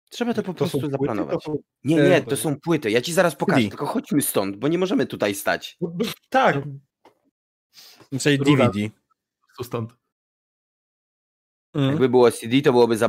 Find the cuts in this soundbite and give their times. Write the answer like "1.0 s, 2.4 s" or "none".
1.7 s

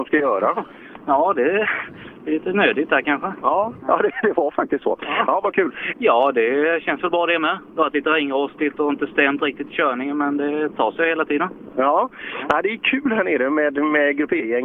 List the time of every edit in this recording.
5.9 s

